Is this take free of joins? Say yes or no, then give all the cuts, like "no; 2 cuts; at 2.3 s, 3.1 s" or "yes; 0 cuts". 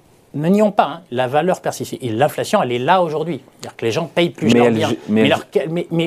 no; 1 cut; at 4.5 s